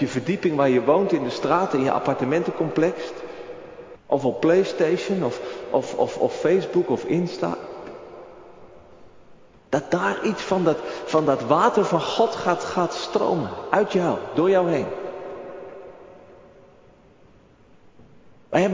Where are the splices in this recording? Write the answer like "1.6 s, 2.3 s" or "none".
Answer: 4.0 s